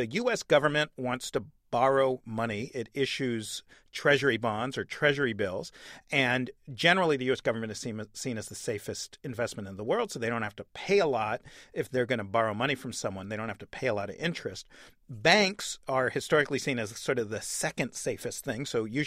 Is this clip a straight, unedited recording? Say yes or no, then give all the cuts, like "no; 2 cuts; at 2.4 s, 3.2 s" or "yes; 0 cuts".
yes; 0 cuts